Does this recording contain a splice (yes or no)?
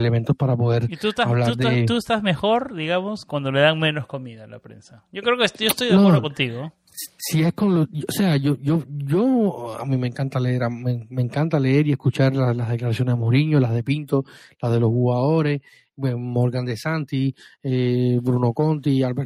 no